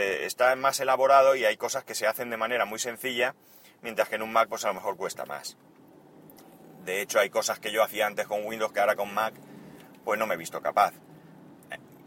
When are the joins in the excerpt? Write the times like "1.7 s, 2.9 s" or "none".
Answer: none